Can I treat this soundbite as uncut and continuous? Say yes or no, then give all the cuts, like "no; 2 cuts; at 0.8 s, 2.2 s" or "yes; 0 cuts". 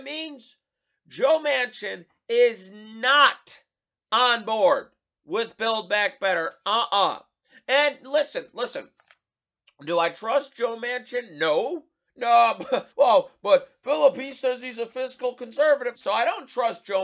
no; 2 cuts; at 12.9 s, 15.9 s